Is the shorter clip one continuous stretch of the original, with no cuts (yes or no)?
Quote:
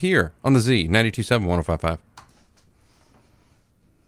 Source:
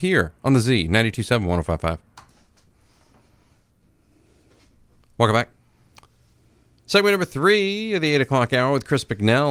yes